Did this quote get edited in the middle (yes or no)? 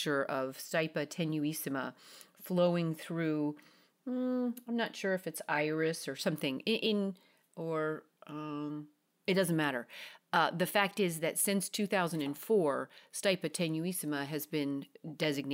no